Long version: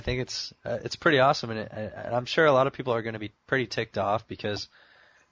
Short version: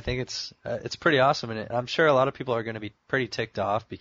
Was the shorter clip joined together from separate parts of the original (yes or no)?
yes